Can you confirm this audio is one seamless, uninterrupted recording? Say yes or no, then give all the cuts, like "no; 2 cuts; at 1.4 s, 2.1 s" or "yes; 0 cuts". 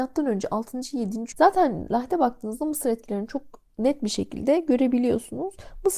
no; 1 cut; at 1.3 s